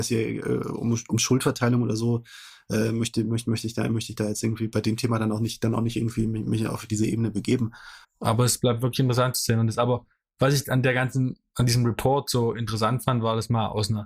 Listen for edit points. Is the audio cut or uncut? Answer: cut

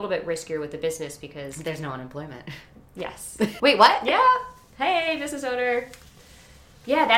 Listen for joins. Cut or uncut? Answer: cut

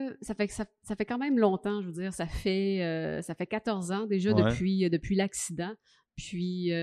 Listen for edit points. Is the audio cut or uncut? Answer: uncut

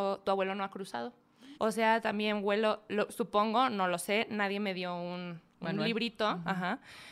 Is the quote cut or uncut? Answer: cut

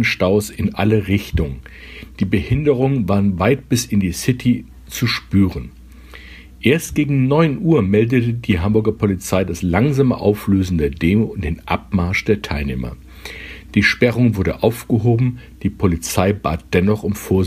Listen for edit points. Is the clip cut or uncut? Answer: uncut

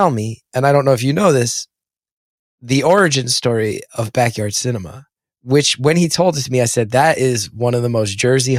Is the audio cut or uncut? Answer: uncut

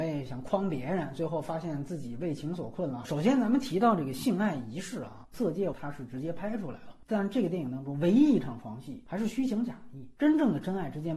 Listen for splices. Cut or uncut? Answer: cut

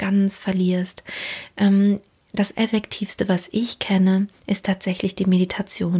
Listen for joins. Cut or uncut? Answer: uncut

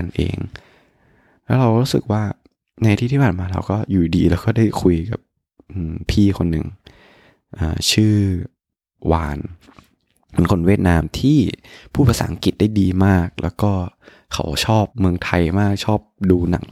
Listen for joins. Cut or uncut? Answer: cut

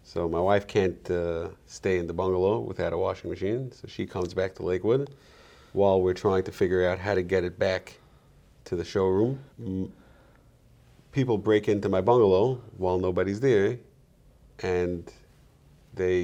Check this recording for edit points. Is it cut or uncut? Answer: cut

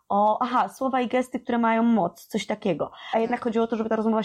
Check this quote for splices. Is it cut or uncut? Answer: cut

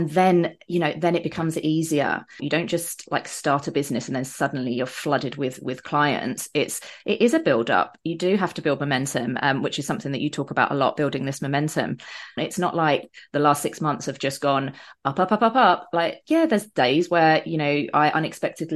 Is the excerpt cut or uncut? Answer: cut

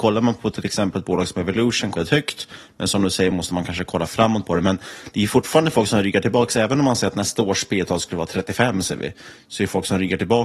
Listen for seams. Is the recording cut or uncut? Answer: cut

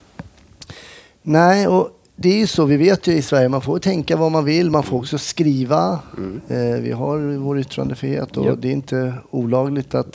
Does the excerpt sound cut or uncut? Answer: uncut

